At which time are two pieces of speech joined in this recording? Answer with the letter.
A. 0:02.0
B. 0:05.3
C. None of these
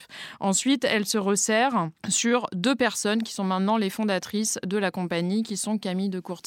A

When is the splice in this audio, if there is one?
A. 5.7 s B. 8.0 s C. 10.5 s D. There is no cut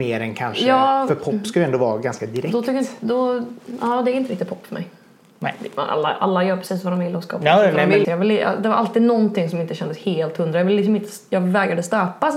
B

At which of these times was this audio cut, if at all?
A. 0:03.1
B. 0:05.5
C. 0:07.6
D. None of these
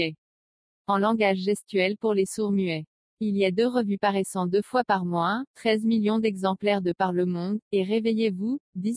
B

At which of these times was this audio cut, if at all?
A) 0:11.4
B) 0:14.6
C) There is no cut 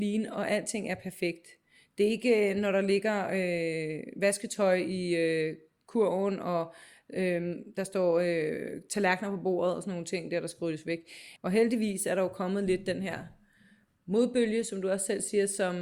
A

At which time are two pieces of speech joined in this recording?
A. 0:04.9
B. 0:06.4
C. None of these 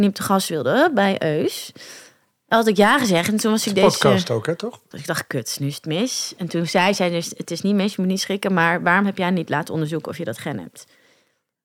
A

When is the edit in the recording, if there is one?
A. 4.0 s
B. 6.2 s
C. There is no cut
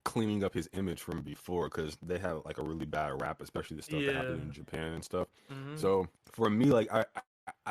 B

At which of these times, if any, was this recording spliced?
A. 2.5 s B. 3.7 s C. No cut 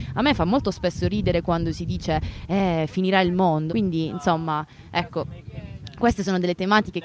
B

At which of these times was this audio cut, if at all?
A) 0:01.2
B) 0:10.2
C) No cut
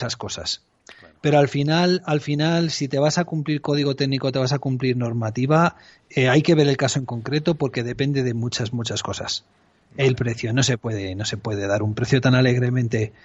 C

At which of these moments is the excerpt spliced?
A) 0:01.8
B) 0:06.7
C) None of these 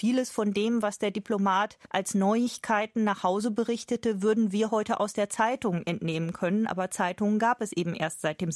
A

